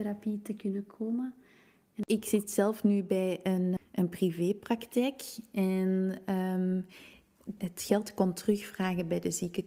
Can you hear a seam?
yes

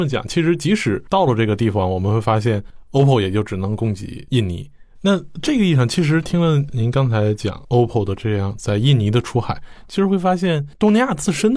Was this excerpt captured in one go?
no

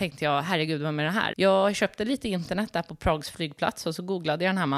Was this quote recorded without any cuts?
no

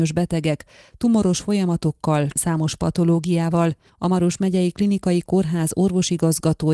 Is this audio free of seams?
no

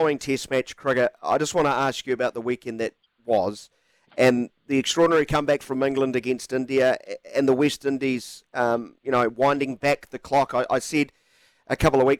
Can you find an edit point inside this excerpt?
no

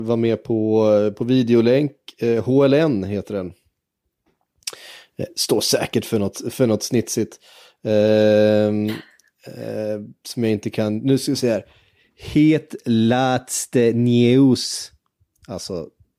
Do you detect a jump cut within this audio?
no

